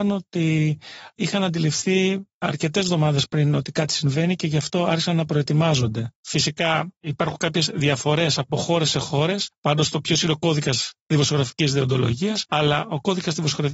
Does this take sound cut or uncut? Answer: cut